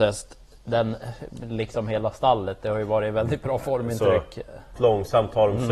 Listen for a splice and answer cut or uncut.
cut